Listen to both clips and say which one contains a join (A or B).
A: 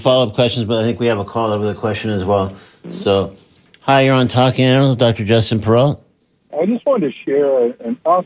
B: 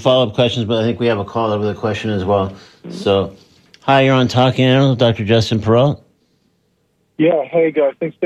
A